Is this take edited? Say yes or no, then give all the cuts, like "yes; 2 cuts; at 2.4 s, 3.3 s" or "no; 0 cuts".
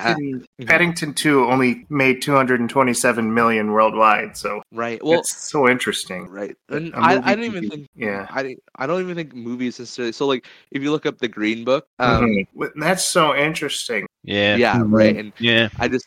yes; 2 cuts; at 12.5 s, 14.1 s